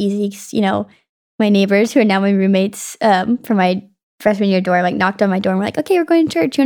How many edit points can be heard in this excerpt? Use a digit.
0